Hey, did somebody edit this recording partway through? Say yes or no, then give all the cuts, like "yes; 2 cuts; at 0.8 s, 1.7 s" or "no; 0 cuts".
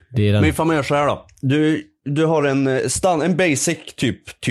no; 0 cuts